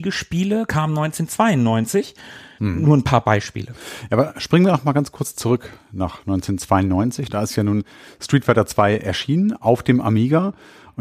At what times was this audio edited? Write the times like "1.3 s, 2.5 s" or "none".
2.6 s